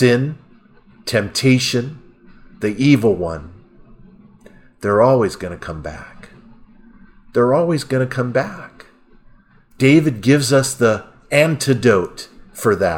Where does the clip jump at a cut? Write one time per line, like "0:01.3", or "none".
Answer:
none